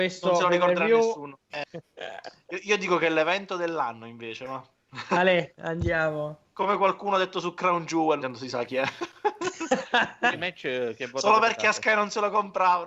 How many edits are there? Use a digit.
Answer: 3